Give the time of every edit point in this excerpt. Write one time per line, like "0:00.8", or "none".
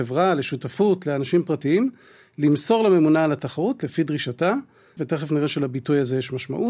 0:05.0